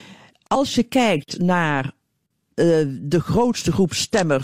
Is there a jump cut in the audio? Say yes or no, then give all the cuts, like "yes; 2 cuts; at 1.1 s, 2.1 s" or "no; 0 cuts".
no; 0 cuts